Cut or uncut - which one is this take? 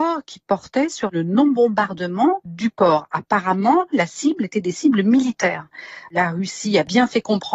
cut